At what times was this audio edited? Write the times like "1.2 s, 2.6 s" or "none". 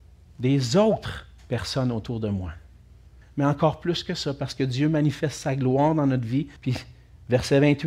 3.2 s, 6.6 s

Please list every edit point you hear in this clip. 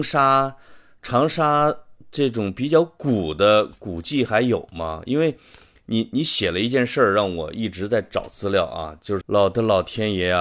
9.2 s

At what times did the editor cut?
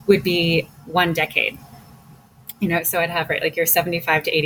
none

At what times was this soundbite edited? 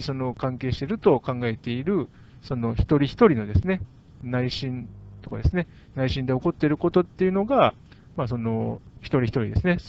none

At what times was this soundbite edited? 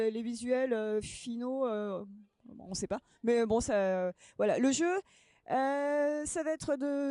none

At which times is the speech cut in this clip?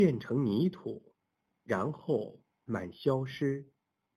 2.7 s

